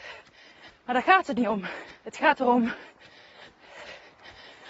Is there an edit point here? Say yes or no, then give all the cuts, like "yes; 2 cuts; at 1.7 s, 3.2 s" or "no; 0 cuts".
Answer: yes; 1 cut; at 2.0 s